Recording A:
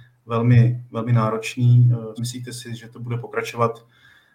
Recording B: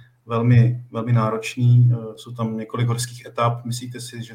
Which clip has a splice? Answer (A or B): A